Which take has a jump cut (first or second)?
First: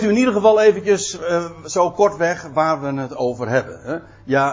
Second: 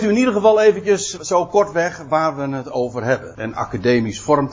second